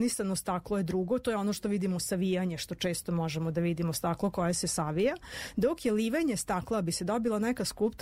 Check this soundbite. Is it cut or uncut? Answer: uncut